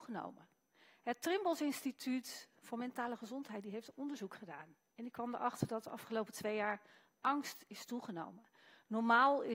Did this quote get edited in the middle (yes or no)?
no